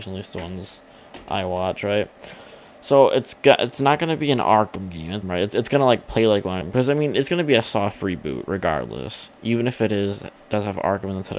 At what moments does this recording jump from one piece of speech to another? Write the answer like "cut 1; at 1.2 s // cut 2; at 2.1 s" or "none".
cut 1; at 5.2 s // cut 2; at 6.6 s